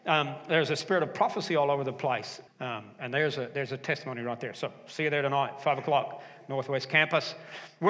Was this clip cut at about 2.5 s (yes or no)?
yes